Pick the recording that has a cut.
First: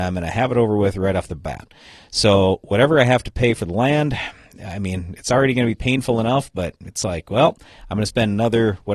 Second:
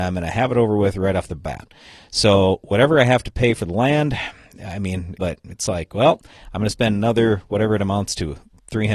second; 1 cut; at 5.2 s

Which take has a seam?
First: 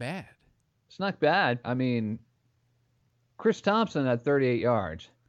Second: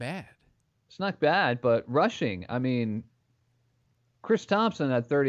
first; 1 cut; at 1.6 s

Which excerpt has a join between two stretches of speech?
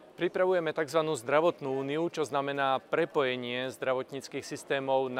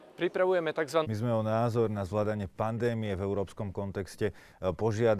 second; 1 cut; at 1.0 s

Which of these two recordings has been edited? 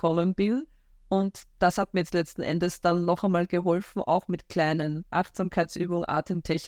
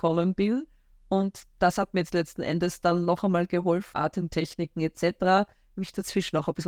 second; 1 cut; at 3.9 s

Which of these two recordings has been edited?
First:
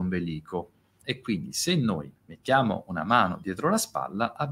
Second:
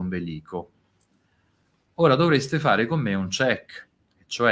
first; 2 cuts; at 1.0 s, 2.2 s

